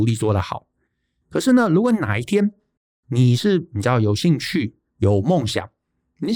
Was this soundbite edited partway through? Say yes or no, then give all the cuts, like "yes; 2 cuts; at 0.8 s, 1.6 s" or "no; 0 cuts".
no; 0 cuts